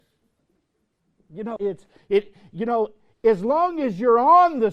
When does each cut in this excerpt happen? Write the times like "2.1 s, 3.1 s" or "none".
1.6 s